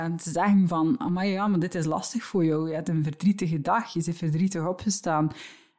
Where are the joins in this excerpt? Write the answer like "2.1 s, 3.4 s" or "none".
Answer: none